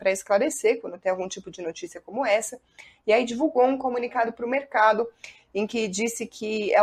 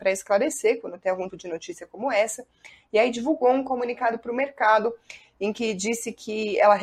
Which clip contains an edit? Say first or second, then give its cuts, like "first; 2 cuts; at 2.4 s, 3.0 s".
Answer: second; 1 cut; at 1.3 s